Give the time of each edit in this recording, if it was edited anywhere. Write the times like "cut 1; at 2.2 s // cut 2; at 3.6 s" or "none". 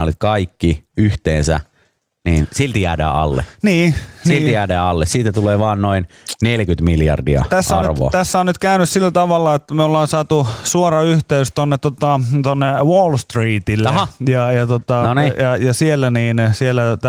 none